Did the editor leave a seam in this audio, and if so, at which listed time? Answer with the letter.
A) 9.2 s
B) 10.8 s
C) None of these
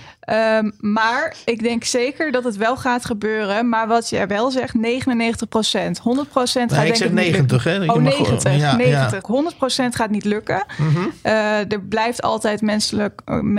A